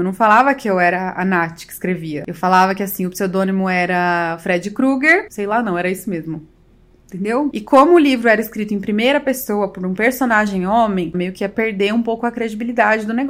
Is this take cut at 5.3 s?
yes; 3 cuts; at 5.3 s, 7.5 s, 11.1 s

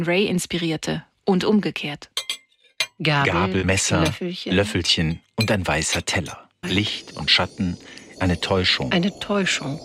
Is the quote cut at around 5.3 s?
no; 3 cuts; at 3.6 s, 6.6 s, 8.2 s

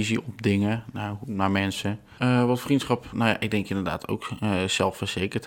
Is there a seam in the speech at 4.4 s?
no; 1 cut; at 2.2 s

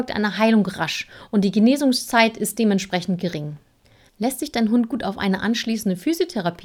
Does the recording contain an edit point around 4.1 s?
yes; 1 cut; at 4.1 s

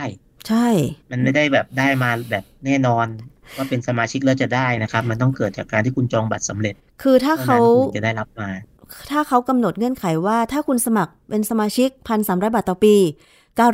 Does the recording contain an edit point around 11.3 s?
no; 1 cut; at 1.0 s

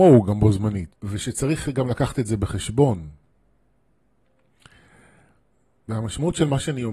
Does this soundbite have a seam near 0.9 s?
yes; 1 cut; at 0.9 s

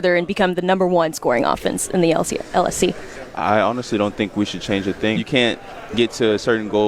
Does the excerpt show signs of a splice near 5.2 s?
yes; 1 cut; at 5.2 s

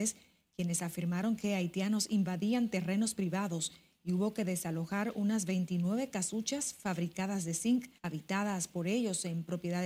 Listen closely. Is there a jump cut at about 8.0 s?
yes; 1 cut; at 8.0 s

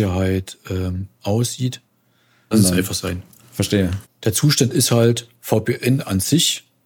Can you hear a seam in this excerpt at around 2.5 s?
yes; 2 cuts; at 2.5 s, 4.0 s

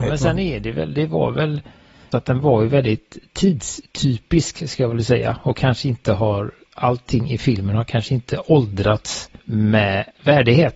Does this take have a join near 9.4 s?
yes; 2 cuts; at 2.1 s, 9.4 s

